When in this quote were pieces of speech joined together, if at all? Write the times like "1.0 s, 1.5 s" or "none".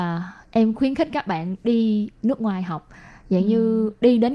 none